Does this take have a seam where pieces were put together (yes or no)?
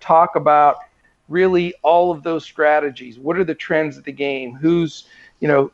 no